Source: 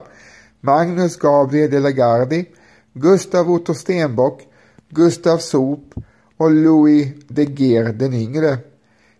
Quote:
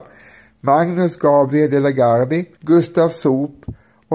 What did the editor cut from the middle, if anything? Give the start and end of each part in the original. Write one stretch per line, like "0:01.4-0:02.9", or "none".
0:02.6-0:04.9